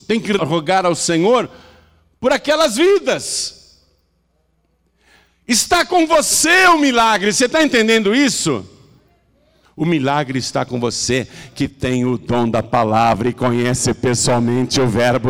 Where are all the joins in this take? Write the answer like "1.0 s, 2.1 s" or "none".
9.6 s